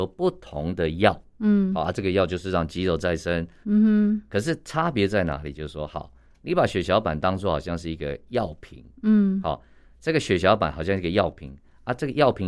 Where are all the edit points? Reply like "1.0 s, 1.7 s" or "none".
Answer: 3.6 s